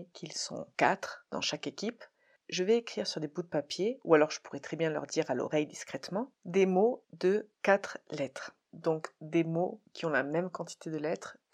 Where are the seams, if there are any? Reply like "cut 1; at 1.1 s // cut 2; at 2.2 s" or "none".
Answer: none